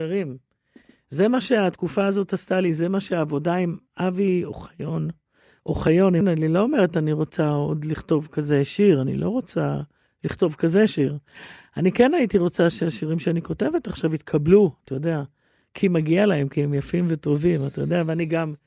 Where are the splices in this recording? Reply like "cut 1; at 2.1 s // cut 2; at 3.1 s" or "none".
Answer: cut 1; at 6.2 s